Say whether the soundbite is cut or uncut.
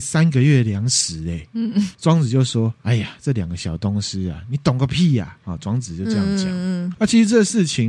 uncut